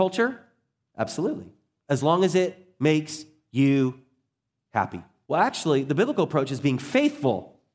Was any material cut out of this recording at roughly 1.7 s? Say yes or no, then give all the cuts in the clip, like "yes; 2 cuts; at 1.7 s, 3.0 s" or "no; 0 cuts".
no; 1 cut; at 5.3 s